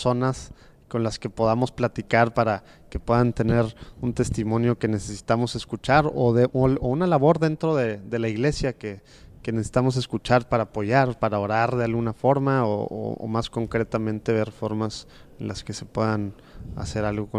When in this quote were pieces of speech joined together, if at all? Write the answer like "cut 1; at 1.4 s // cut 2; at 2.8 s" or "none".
none